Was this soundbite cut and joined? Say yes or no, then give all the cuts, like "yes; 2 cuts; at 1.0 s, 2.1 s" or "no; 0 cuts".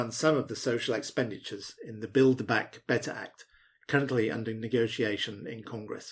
no; 0 cuts